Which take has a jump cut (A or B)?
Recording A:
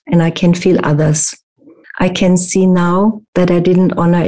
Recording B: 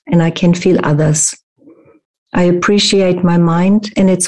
A